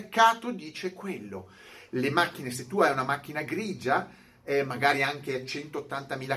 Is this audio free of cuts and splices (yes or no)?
yes